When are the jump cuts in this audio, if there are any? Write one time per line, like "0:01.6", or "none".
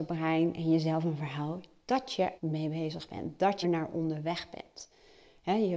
0:02.4
0:03.6